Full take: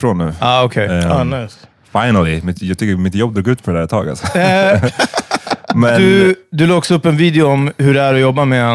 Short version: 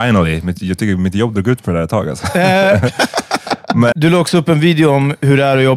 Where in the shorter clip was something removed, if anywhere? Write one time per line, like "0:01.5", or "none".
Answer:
0:03.9